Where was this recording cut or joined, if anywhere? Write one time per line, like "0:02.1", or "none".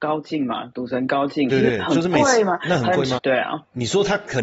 0:01.5
0:03.2